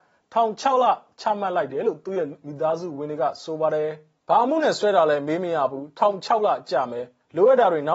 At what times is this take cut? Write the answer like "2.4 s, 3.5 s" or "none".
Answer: 4.2 s

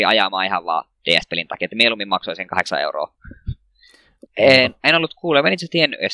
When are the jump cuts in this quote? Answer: 4.3 s

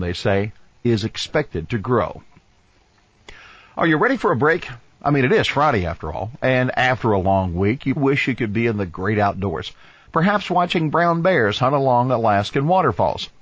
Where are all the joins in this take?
8.0 s

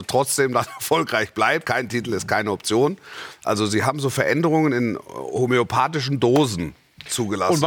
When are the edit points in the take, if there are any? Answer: 1.6 s, 3.4 s

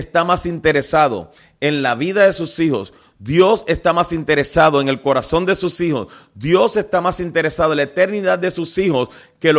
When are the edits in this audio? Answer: none

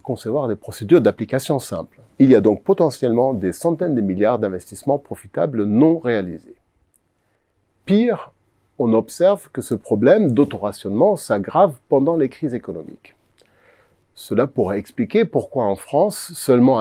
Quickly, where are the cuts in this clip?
2.1 s

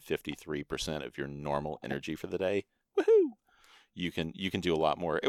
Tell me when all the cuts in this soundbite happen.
none

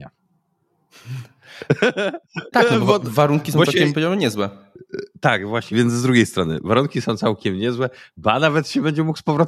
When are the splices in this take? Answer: 5.7 s

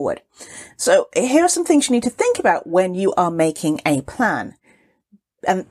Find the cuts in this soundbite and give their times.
none

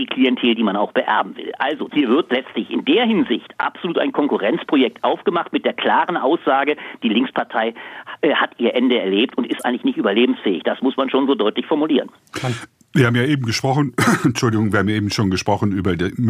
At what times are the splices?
1.9 s

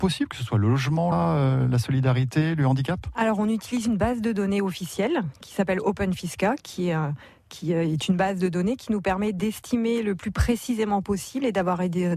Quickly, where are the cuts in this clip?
1.1 s

